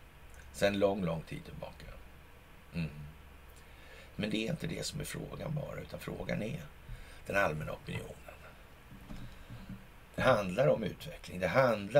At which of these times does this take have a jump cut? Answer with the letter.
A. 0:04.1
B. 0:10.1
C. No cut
C